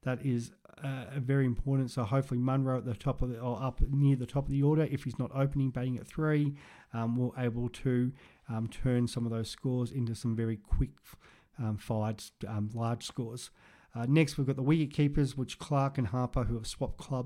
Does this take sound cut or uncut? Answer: uncut